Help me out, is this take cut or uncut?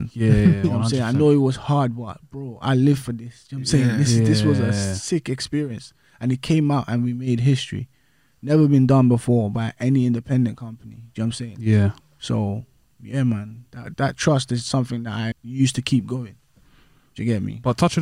cut